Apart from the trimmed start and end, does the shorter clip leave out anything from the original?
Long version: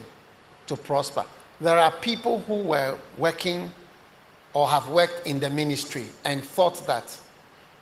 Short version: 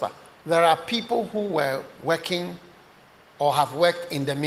no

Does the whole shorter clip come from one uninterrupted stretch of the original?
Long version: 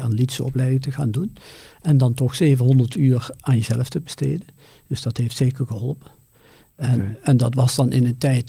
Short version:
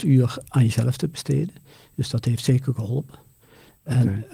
yes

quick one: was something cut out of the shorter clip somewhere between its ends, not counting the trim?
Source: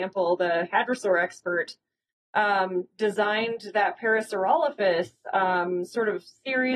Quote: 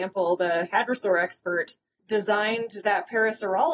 yes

